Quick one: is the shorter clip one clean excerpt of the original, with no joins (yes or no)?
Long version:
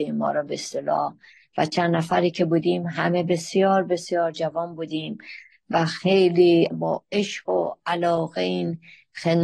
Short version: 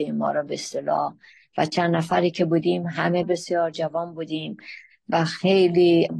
no